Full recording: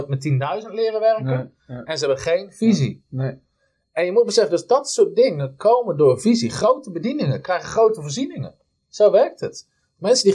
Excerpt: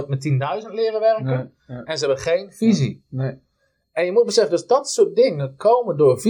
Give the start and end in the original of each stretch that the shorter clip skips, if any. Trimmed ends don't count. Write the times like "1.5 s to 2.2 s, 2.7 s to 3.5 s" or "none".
none